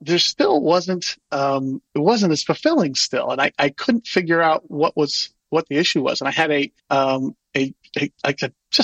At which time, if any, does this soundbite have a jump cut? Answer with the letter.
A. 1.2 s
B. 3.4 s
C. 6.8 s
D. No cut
C